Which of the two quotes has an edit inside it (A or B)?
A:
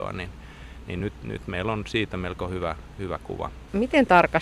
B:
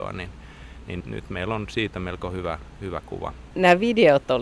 B